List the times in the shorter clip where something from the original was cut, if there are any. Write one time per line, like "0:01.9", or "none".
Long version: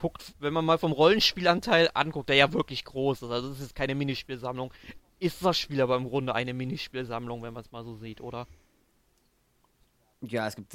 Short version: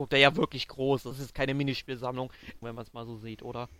0:01.1
0:02.6